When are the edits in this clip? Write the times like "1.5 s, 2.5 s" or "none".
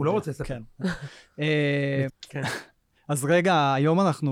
2.1 s